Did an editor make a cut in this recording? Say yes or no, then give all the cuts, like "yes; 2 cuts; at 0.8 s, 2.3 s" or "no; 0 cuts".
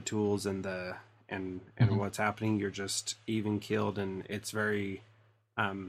no; 0 cuts